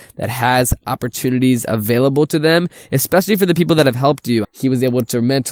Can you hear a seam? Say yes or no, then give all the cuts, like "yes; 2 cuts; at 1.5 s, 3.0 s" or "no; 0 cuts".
yes; 1 cut; at 4.4 s